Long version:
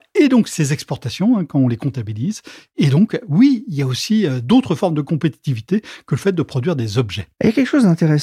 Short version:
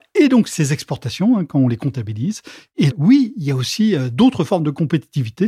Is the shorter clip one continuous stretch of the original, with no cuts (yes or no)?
no